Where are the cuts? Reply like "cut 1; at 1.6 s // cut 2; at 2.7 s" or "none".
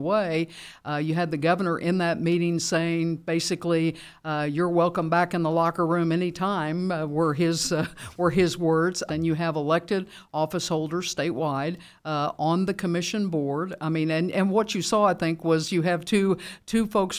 cut 1; at 9.1 s